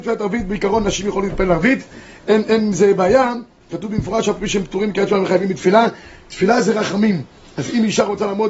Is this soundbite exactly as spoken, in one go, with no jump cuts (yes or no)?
yes